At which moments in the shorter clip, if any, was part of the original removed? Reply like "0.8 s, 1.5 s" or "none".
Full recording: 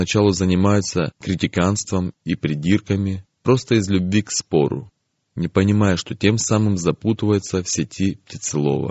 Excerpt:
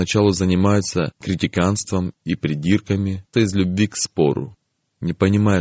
3.3 s